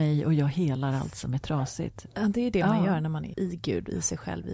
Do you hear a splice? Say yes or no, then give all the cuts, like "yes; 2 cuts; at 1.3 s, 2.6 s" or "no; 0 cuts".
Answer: yes; 1 cut; at 3.3 s